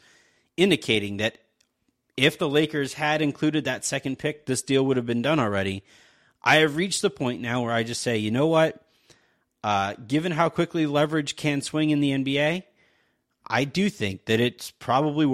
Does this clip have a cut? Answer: no; 0 cuts

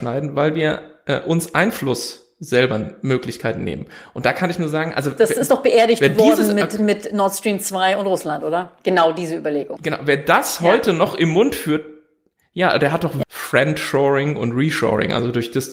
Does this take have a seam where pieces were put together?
yes; 2 cuts; at 9.8 s, 13.2 s

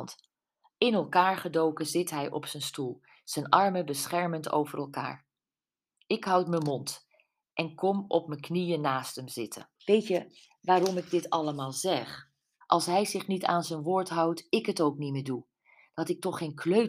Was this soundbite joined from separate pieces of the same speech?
yes; 2 cuts; at 9.8 s, 12.6 s

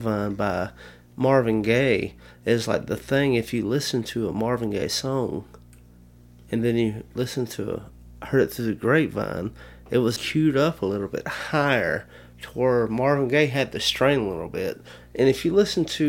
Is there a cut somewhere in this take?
yes; 1 cut; at 10.2 s

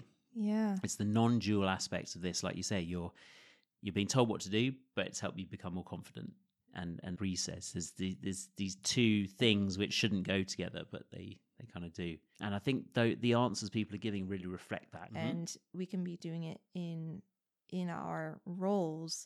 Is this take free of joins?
no; 3 cuts; at 7.2 s, 12.3 s, 15.1 s

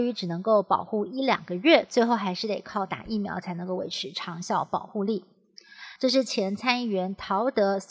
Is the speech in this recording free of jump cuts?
no; 1 cut; at 6.0 s

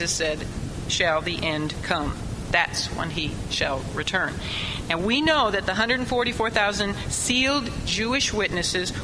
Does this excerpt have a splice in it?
no; 0 cuts

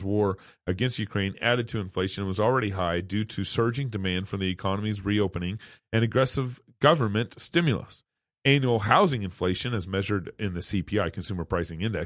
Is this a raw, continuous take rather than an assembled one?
yes; 0 cuts

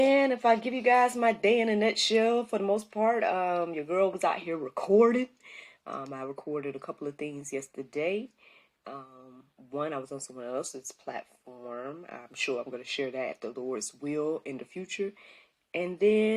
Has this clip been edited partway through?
no; 0 cuts

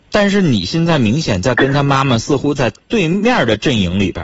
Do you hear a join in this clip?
no; 0 cuts

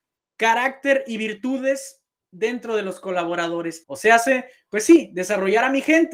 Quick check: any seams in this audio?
yes; 1 cut; at 3.8 s

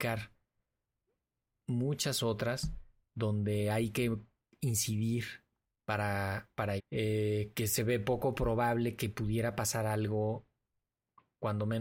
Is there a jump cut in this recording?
yes; 1 cut; at 6.8 s

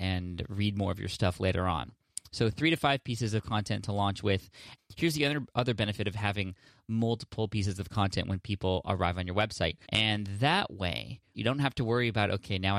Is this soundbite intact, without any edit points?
no; 3 cuts; at 4.8 s, 9.9 s, 11.3 s

